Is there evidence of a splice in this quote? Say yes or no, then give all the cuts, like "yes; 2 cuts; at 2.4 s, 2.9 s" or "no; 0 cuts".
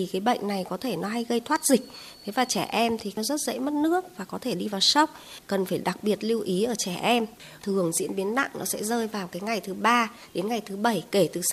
yes; 1 cut; at 7.6 s